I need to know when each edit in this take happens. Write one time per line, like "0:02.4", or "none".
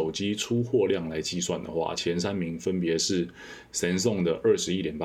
none